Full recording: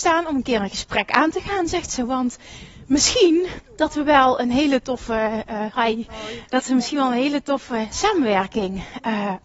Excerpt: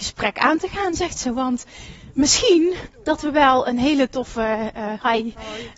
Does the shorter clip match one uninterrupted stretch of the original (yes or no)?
yes